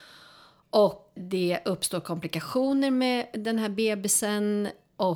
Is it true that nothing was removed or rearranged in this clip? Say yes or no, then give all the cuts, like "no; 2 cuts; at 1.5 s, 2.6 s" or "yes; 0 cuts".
no; 1 cut; at 1.2 s